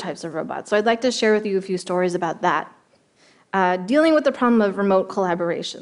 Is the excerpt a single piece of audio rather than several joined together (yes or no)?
yes